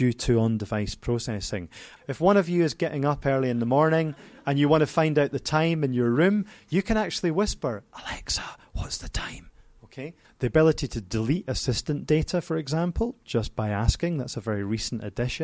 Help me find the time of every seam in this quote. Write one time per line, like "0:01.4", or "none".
0:02.0
0:10.2